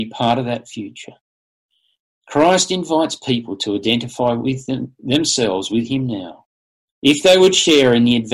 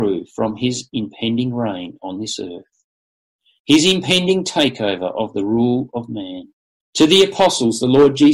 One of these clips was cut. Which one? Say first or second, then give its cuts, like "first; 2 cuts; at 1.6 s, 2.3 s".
second; 1 cut; at 6.8 s